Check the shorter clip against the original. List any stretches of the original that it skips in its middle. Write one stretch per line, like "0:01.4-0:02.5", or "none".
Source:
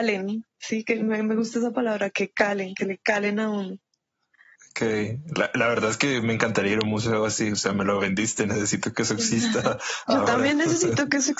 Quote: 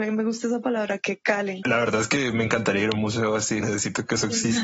0:02.7-0:05.5
0:07.5-0:08.5

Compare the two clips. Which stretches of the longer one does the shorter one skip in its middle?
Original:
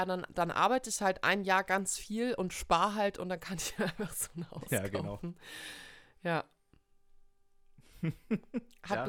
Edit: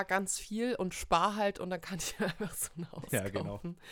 none

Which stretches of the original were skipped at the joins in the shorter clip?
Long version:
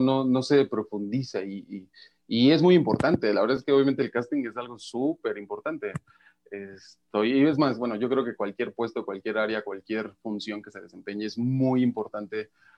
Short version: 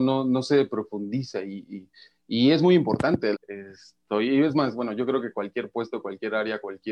0:03.3-0:06.4

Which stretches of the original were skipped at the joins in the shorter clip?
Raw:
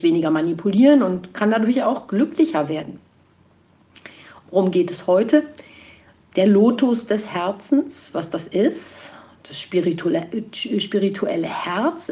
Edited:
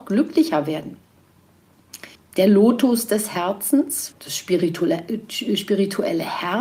0:04.2-0:06.1
0:08.1-0:09.4

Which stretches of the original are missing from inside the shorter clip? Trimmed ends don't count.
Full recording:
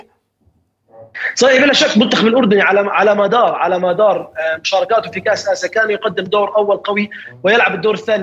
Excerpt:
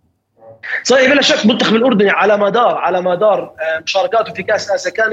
0:02.6-0:02.9

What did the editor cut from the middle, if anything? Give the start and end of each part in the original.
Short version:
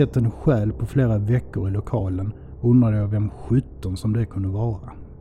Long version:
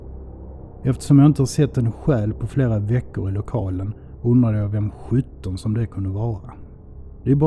none

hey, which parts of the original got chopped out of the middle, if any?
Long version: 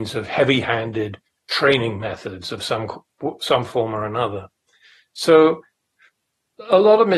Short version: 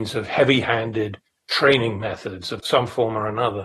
0:02.6-0:03.4

